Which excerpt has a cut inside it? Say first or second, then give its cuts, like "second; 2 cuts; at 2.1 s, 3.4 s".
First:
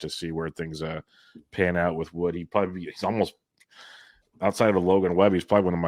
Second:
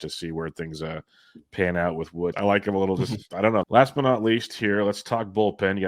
second; 2 cuts; at 2.3 s, 3.6 s